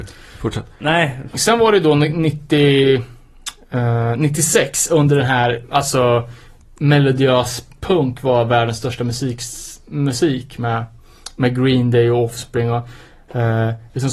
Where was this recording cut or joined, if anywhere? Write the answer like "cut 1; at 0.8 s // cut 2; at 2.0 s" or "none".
cut 1; at 1.3 s